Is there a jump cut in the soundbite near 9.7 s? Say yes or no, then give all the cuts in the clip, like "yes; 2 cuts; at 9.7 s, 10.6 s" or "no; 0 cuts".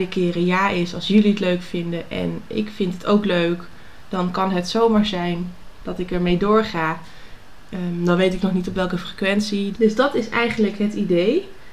yes; 1 cut; at 9.7 s